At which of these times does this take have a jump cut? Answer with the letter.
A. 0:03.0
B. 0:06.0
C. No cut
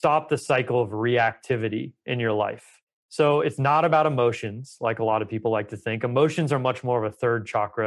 C